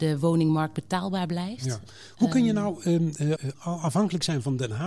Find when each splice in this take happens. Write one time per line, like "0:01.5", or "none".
0:03.4